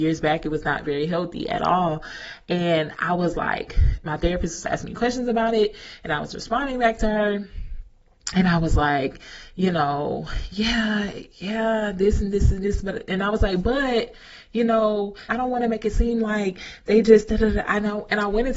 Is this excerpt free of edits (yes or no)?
no